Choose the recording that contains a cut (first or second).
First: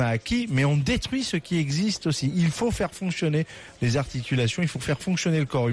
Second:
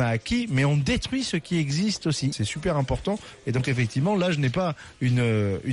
second